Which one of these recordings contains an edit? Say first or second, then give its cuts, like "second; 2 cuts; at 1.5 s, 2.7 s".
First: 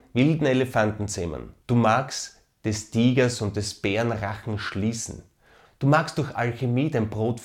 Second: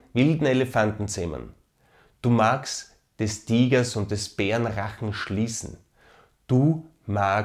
first; 2 cuts; at 1.6 s, 5.6 s